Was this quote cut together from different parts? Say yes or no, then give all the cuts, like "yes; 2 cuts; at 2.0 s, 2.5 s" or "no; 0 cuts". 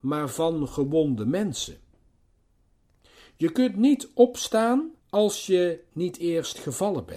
yes; 1 cut; at 5.0 s